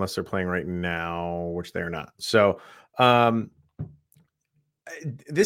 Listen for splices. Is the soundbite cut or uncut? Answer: uncut